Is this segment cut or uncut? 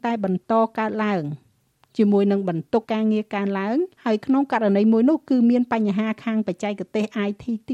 cut